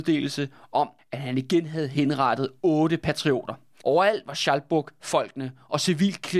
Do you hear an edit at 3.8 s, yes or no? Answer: yes